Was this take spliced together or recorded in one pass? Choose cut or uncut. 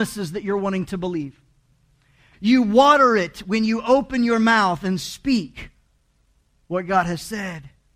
cut